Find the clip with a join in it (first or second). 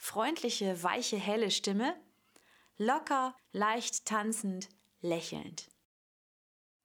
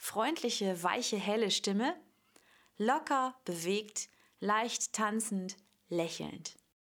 first